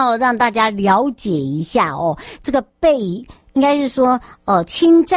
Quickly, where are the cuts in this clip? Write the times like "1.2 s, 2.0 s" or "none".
none